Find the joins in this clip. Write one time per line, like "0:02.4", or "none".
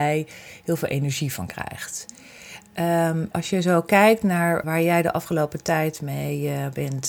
0:03.3
0:04.6